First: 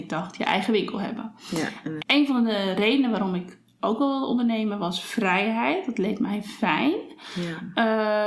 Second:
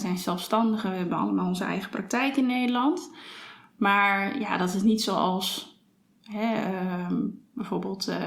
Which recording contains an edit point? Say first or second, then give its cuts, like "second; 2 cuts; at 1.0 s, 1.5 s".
first; 1 cut; at 2.0 s